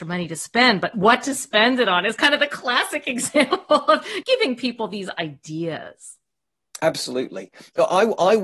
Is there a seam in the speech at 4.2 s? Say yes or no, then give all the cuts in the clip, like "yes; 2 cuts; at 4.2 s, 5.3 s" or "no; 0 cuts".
yes; 1 cut; at 4.2 s